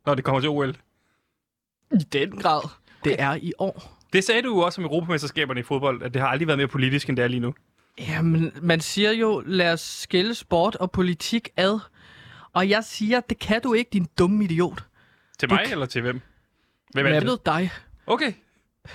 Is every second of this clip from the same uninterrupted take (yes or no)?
no